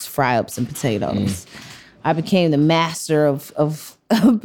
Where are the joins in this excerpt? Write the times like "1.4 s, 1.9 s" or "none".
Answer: none